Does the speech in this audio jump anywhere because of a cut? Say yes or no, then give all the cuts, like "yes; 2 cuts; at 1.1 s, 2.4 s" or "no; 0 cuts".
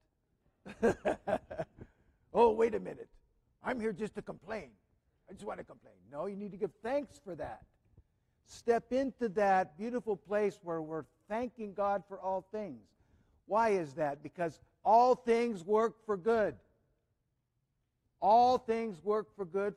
no; 0 cuts